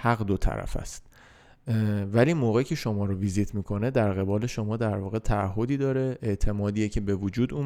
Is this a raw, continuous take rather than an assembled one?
yes; 0 cuts

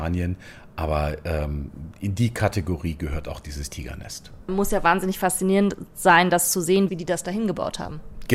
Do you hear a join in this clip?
yes; 1 cut; at 6.9 s

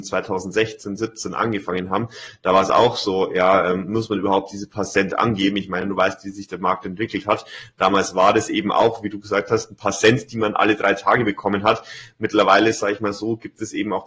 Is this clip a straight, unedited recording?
yes; 0 cuts

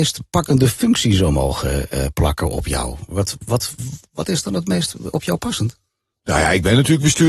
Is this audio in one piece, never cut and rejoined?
yes; 0 cuts

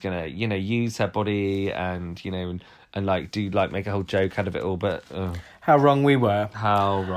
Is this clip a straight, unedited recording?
yes; 0 cuts

